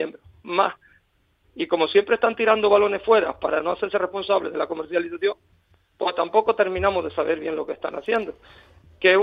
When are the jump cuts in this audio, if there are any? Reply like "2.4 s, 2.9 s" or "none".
1.4 s